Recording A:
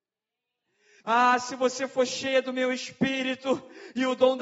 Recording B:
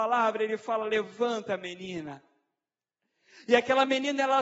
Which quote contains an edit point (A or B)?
A